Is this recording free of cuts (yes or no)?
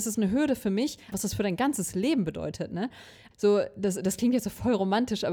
no